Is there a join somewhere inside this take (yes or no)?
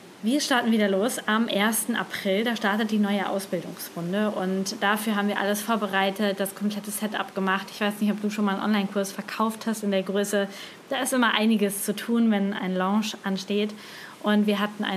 no